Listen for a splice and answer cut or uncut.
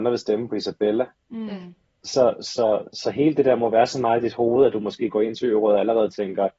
uncut